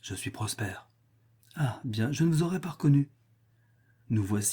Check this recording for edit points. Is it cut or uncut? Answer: uncut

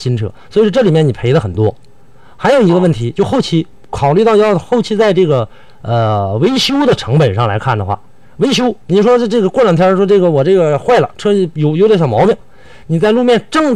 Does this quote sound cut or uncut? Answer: uncut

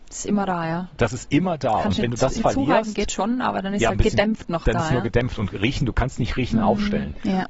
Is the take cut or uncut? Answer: uncut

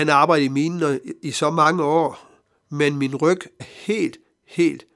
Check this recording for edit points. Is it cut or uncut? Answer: cut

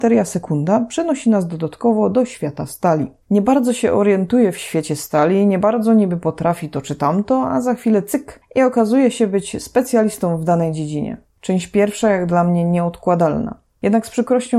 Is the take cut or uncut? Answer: cut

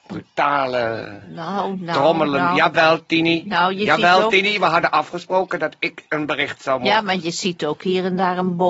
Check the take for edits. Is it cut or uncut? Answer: uncut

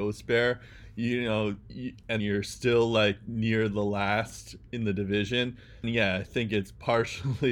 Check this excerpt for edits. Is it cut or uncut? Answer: cut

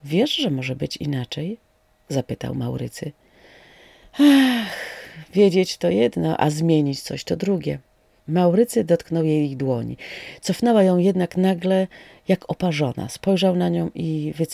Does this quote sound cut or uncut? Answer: cut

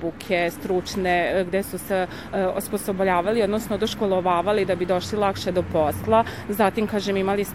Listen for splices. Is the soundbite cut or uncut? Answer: uncut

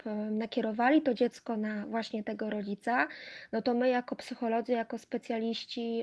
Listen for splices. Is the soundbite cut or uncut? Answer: uncut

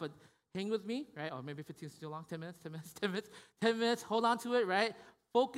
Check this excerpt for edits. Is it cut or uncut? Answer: uncut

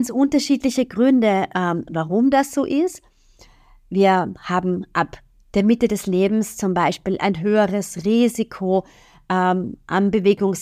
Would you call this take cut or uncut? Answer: uncut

